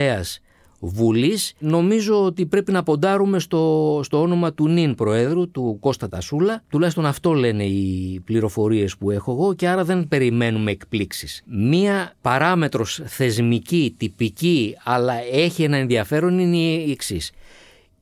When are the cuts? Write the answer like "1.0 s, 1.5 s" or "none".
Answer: none